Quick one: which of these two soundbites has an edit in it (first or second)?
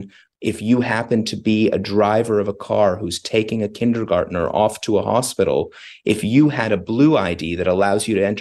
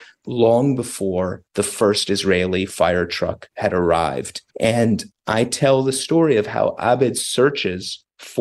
second